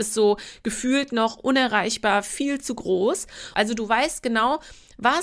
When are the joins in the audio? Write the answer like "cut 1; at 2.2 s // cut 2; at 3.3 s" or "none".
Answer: cut 1; at 3.5 s